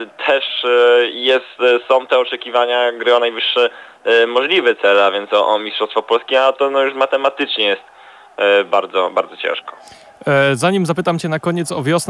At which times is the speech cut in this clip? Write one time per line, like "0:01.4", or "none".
none